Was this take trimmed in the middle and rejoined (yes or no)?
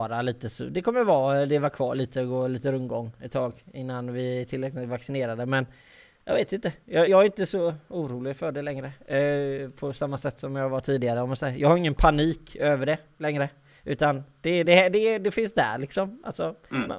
yes